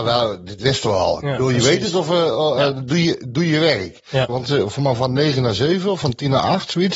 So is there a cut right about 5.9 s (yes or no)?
no